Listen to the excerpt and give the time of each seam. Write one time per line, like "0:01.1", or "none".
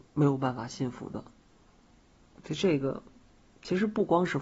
none